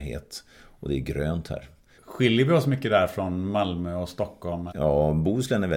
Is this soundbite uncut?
no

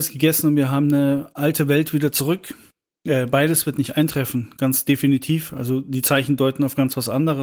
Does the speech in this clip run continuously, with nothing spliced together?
yes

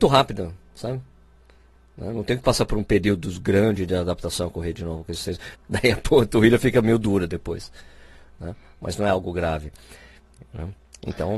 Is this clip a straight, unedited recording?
no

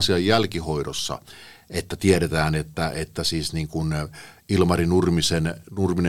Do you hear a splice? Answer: no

